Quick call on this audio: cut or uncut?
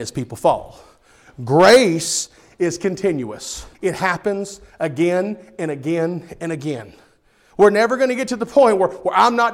cut